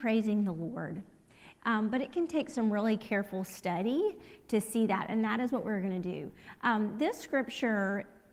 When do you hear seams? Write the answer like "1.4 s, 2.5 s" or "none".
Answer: 1.6 s